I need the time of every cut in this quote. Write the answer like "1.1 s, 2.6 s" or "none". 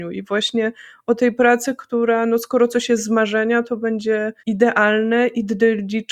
4.4 s

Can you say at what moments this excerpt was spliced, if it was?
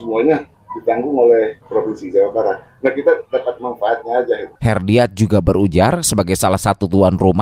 4.6 s

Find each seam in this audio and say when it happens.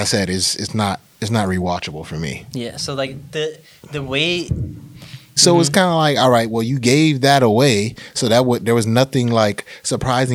5.4 s

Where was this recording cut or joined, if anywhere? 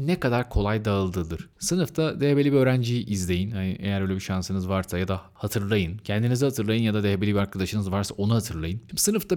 none

